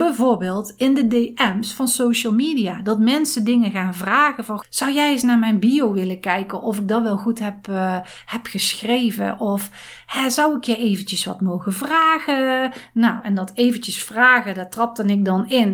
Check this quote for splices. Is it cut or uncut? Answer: cut